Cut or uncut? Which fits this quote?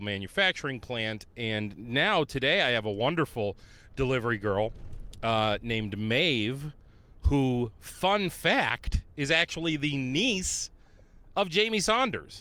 uncut